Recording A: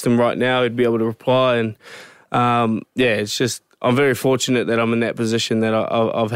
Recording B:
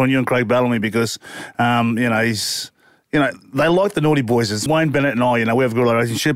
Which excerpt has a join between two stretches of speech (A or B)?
B